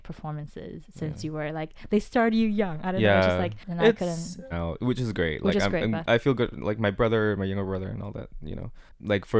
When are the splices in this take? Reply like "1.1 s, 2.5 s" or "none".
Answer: 4.5 s